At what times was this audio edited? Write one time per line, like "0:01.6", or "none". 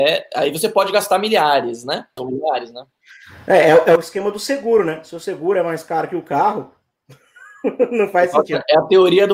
0:02.2